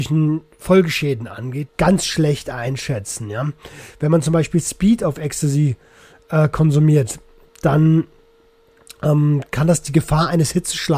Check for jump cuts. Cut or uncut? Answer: cut